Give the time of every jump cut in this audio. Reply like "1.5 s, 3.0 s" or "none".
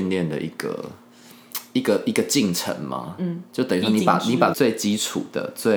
4.5 s